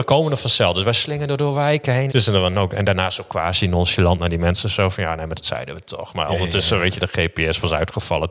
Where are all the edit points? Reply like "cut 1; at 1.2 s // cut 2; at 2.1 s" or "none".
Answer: cut 1; at 2.1 s